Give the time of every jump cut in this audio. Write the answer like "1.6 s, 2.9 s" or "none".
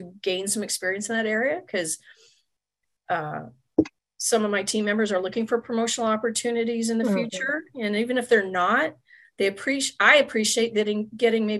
none